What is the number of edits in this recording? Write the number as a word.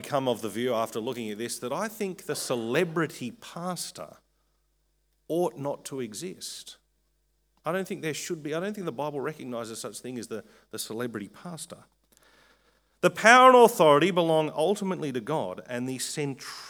zero